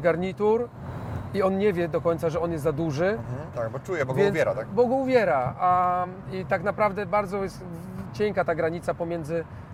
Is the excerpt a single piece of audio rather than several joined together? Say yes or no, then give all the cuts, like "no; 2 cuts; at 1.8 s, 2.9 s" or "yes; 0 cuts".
no; 1 cut; at 3.5 s